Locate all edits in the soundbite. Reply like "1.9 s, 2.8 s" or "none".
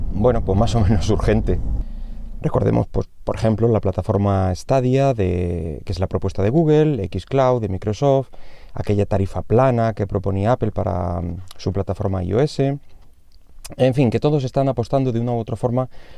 2.4 s